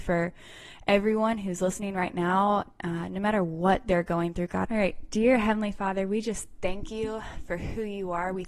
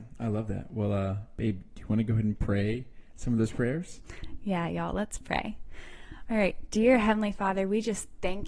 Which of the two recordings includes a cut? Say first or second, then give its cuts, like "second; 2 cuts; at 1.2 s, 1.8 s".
first; 1 cut; at 4.7 s